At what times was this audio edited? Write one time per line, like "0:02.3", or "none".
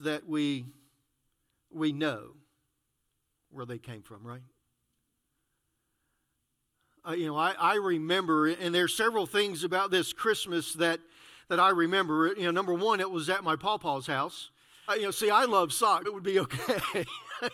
0:14.9
0:16.0